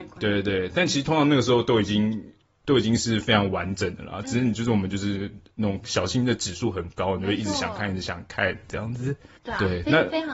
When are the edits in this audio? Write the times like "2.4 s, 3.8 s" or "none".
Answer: none